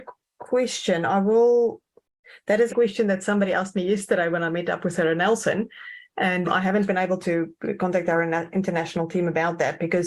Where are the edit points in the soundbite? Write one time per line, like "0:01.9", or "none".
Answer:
0:02.7
0:06.4